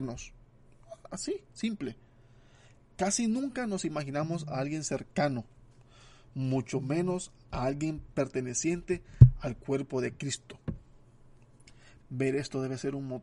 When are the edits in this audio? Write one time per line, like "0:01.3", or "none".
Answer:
0:12.0